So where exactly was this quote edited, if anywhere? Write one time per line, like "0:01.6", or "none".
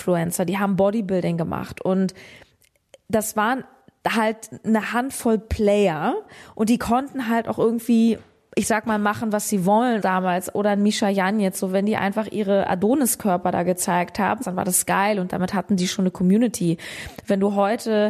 0:10.0
0:14.4